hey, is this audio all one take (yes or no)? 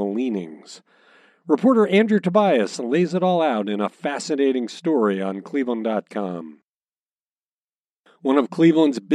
yes